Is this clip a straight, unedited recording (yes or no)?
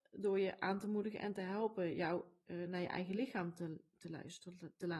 yes